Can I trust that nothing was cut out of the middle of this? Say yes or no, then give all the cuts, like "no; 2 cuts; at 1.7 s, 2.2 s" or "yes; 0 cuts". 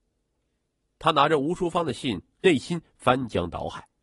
no; 1 cut; at 2.4 s